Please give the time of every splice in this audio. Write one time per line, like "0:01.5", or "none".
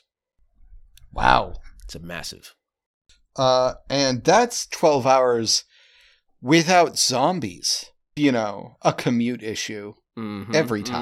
0:08.2